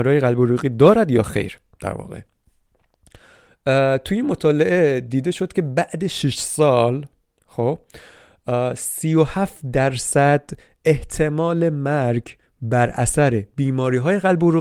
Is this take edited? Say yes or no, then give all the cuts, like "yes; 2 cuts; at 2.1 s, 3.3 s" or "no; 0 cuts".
no; 0 cuts